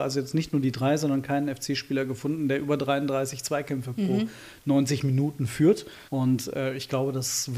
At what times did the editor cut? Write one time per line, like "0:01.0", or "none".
0:06.1